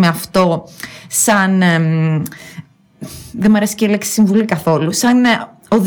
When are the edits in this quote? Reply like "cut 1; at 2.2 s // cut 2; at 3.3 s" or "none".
none